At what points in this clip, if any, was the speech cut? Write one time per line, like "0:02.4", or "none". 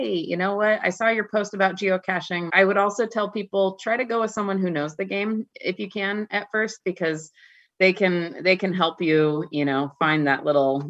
0:02.5